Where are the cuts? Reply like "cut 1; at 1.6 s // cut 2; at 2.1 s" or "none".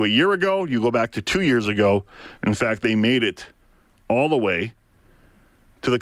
cut 1; at 2.4 s